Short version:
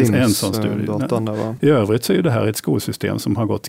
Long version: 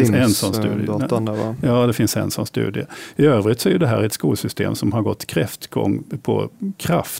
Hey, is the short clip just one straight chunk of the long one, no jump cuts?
no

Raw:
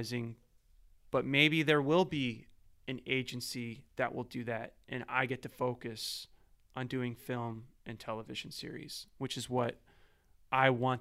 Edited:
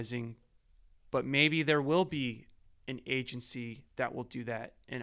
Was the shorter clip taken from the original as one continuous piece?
yes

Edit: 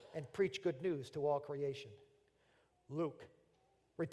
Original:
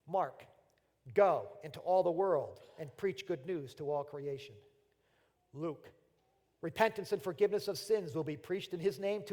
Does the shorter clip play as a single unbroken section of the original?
yes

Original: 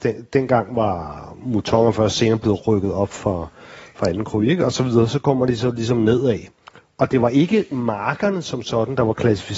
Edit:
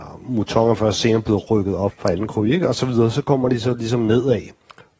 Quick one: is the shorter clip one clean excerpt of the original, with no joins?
no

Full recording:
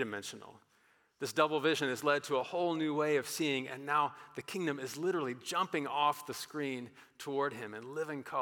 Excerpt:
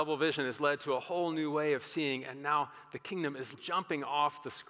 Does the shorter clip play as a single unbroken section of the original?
no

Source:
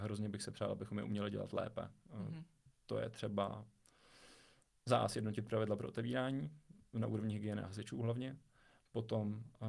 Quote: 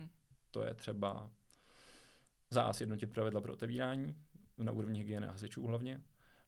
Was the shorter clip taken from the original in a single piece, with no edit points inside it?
yes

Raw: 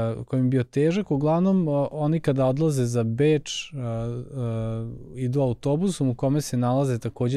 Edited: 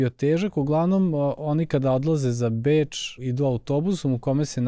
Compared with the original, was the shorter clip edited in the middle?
yes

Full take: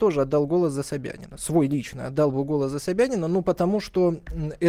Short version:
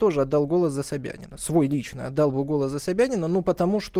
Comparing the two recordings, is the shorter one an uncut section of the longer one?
yes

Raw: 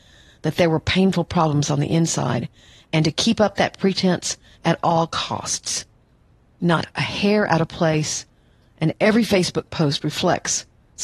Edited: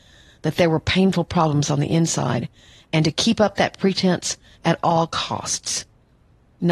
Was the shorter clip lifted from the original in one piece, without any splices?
yes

